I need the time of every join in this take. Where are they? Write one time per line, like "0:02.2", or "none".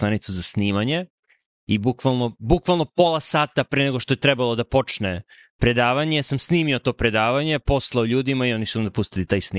none

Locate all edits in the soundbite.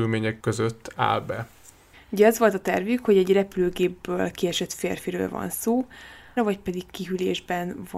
0:01.9
0:06.4

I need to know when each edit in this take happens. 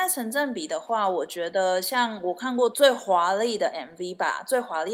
0:02.7

